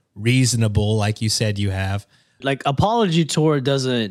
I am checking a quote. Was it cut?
yes; 1 cut; at 2.4 s

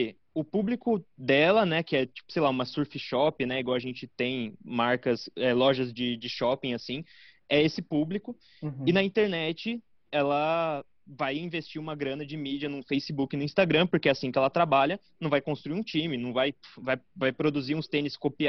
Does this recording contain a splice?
no; 0 cuts

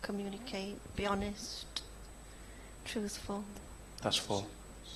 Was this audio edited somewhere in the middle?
no; 0 cuts

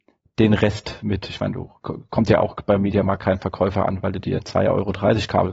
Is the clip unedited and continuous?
yes; 0 cuts

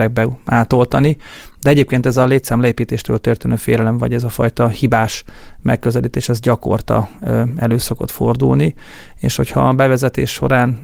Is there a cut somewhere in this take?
no; 0 cuts

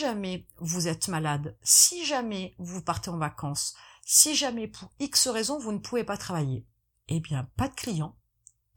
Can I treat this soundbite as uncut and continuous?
yes; 0 cuts

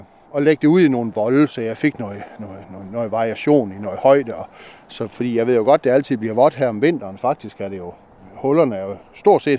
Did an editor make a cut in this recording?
no; 0 cuts

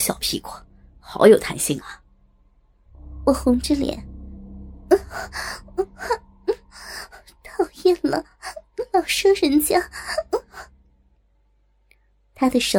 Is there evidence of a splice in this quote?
no; 0 cuts

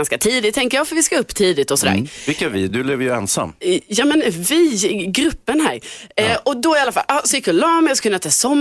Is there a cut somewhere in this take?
no; 0 cuts

